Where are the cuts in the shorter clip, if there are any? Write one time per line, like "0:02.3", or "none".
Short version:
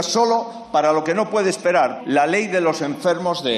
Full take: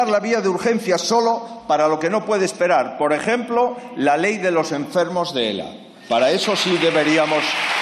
0:02.0